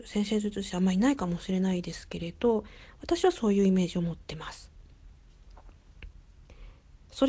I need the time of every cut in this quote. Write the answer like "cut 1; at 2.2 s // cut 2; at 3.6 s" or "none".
none